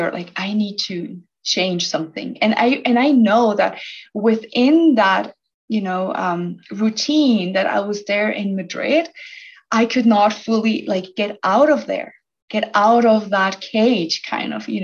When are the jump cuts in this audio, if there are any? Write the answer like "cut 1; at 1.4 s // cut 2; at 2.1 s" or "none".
none